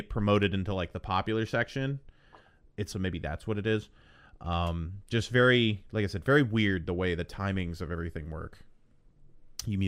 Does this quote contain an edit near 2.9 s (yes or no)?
yes